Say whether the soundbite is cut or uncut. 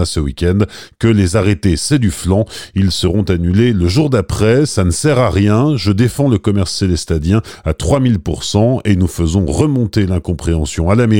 cut